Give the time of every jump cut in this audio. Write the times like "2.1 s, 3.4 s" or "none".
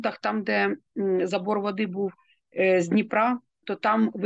none